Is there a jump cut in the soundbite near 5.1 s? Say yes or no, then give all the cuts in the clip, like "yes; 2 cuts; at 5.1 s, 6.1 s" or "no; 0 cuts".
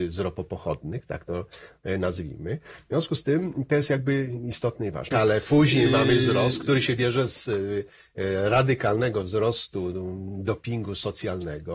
yes; 1 cut; at 5.1 s